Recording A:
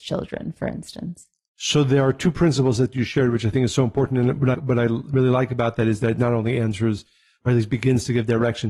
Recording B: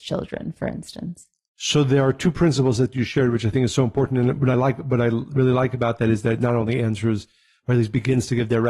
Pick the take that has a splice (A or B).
A